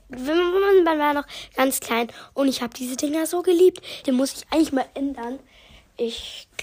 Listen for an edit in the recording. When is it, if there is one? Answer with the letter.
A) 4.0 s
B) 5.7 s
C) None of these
A